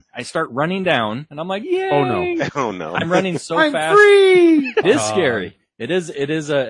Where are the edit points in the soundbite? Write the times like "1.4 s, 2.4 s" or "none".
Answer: 4.8 s